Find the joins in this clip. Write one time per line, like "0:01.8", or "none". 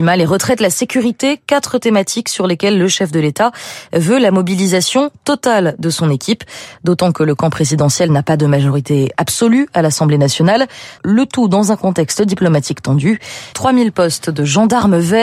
0:11.0
0:13.5